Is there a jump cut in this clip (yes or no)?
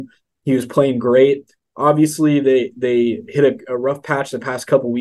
no